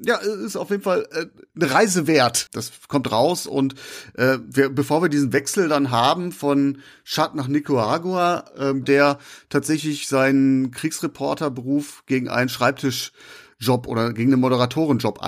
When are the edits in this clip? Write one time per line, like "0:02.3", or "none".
0:02.5
0:08.8